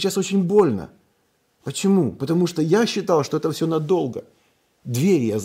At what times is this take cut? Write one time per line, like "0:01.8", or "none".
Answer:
none